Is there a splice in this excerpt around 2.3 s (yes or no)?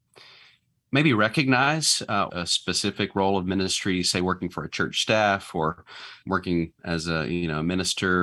yes